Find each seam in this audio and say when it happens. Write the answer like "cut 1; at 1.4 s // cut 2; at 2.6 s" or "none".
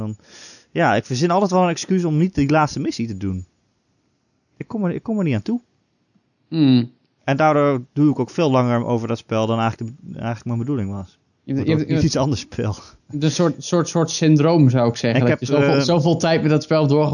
none